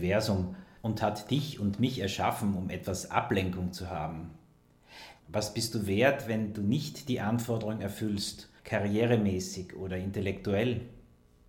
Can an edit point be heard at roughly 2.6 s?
no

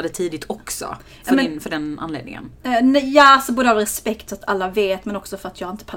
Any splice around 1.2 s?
no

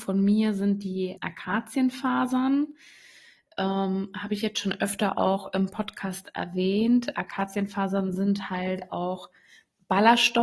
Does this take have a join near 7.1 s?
no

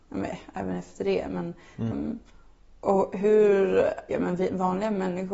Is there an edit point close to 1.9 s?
yes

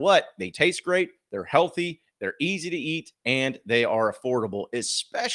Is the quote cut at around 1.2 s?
no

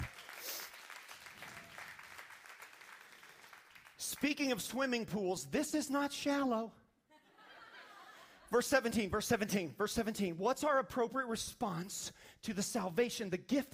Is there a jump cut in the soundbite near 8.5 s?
no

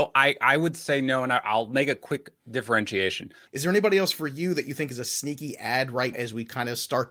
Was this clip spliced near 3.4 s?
yes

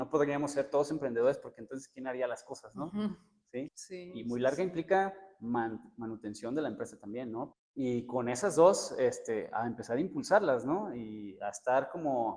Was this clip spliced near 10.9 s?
no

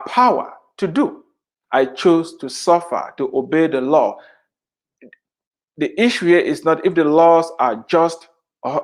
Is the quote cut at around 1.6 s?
yes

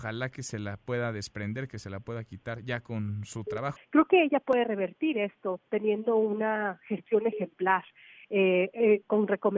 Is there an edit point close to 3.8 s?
yes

